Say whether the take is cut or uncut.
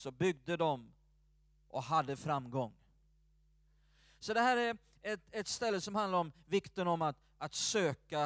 uncut